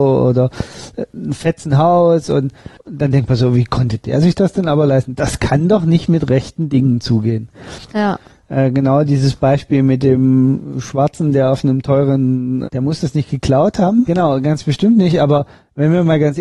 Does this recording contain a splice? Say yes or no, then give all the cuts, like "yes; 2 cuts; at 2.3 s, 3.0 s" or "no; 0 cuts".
yes; 3 cuts; at 7.9 s, 12.6 s, 14.1 s